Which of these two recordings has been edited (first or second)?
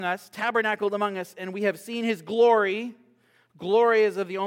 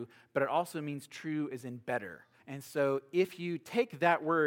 second